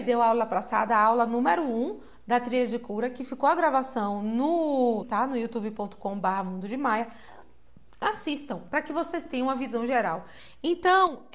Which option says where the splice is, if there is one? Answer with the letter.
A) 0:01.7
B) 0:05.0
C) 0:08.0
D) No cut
B